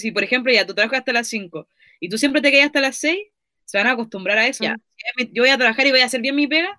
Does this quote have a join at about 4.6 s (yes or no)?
yes